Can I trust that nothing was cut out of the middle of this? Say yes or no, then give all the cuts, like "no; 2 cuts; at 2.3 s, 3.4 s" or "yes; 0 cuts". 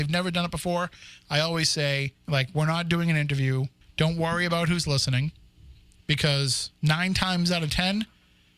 no; 3 cuts; at 2.2 s, 3.8 s, 6.0 s